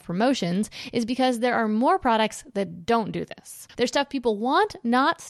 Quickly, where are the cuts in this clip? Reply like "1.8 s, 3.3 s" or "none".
3.7 s